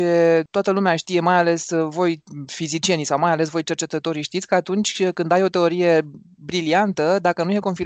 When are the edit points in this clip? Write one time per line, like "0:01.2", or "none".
none